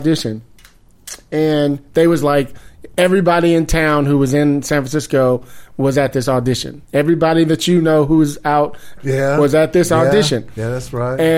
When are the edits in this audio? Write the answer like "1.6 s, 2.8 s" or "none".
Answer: 6.8 s, 9.0 s